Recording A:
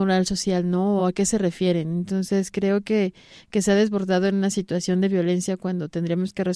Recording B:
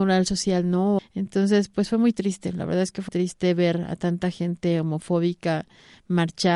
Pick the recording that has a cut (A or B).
B